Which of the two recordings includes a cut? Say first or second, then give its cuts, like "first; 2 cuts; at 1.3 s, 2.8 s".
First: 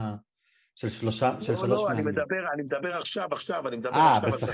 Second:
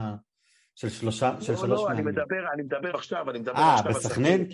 second; 1 cut; at 2.9 s